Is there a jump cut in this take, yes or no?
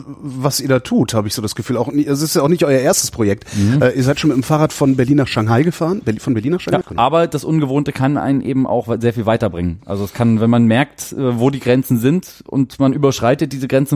yes